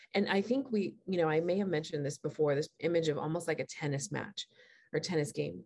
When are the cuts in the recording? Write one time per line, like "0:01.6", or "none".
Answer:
none